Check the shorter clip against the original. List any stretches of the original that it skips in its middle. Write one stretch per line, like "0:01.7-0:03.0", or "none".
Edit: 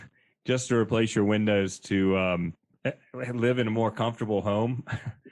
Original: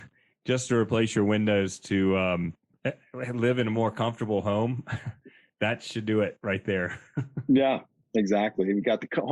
none